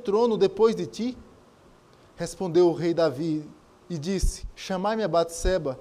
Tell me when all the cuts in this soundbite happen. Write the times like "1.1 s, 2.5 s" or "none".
4.5 s